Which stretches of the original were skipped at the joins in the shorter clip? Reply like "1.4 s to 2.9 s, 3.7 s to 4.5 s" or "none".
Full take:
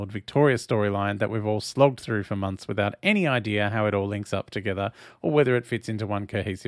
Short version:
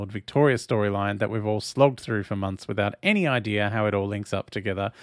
none